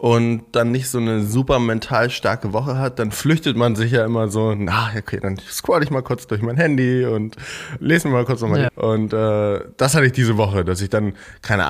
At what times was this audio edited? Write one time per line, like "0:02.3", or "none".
0:08.7